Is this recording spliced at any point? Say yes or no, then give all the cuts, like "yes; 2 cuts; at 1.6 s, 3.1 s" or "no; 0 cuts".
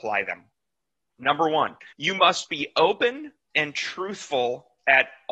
yes; 2 cuts; at 1.9 s, 3.5 s